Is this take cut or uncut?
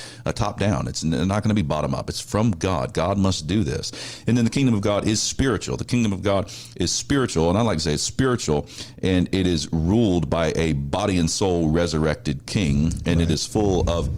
uncut